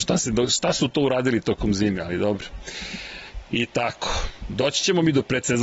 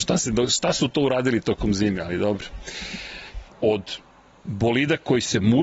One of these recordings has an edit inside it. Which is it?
second; 1 cut; at 3.5 s

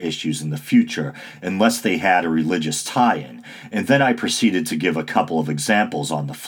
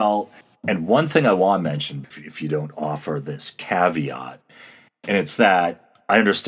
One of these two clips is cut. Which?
second; 1 cut; at 2.1 s

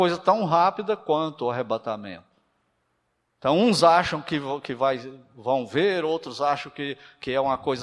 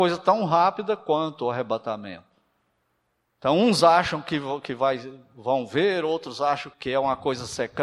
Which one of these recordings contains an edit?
second; 1 cut; at 6.7 s

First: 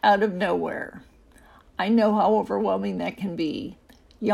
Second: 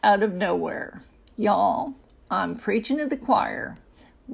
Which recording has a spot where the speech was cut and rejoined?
second; 1 cut; at 1.3 s

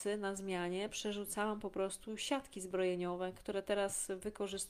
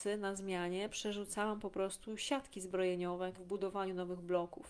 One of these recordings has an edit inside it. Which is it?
second; 1 cut; at 3.3 s

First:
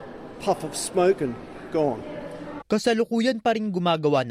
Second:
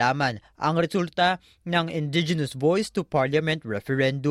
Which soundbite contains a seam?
first; 1 cut; at 2.6 s

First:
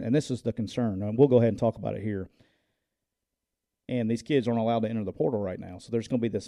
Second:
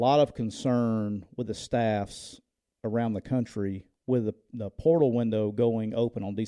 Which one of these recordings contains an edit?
first; 1 cut; at 3.7 s

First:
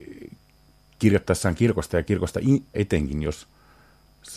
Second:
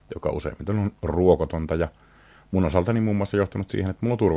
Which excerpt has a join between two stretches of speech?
first; 1 cut; at 2.7 s

